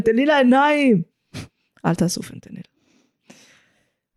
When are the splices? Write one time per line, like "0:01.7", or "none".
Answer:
0:01.1